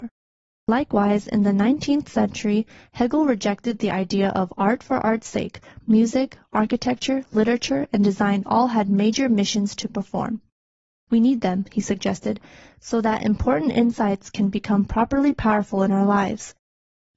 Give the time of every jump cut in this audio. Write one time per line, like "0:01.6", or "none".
0:05.8